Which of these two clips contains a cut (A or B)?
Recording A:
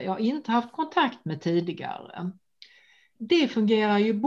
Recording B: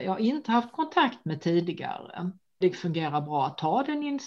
B